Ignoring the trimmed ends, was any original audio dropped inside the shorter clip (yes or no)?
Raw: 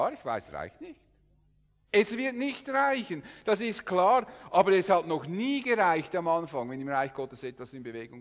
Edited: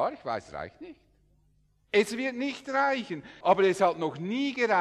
yes